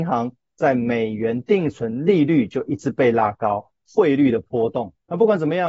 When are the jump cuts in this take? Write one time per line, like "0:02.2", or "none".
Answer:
0:03.7